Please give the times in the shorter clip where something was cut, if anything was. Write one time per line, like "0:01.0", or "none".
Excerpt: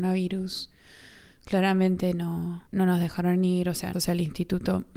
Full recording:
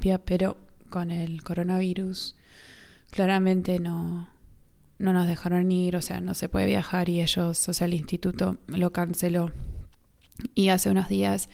0:02.7
0:03.9